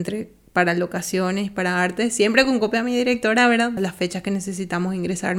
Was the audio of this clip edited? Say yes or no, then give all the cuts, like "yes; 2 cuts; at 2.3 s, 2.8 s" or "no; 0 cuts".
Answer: yes; 1 cut; at 3.8 s